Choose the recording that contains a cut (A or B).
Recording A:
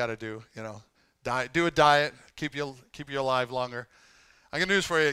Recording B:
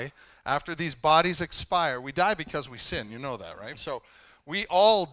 B